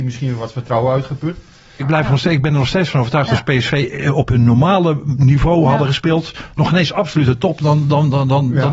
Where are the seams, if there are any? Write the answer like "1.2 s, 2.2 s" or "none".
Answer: 1.8 s